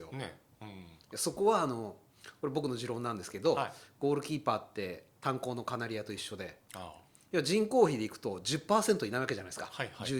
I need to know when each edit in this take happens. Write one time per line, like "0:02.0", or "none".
none